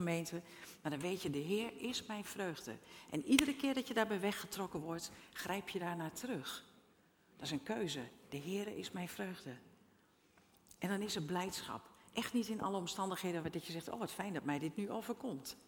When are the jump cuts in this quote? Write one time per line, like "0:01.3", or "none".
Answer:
none